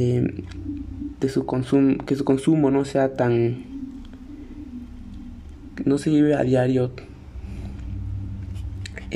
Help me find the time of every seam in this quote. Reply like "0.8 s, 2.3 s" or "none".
none